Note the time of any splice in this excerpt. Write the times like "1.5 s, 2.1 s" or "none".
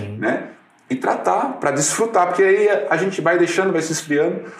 none